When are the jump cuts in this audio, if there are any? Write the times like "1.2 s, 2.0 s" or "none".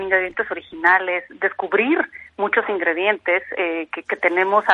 none